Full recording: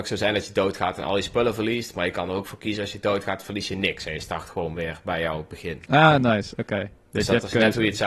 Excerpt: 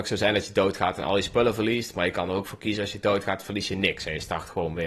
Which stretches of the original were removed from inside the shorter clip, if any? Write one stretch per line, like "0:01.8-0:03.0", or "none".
none

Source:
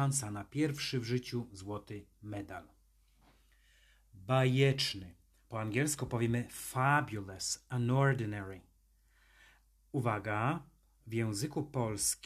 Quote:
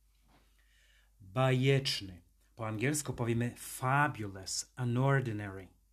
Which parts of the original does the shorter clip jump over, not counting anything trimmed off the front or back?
none

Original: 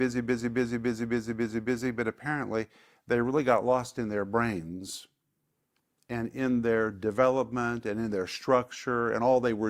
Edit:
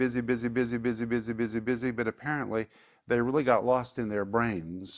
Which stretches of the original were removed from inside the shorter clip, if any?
none

